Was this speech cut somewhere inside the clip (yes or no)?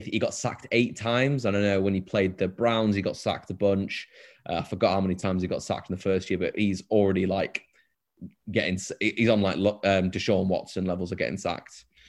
no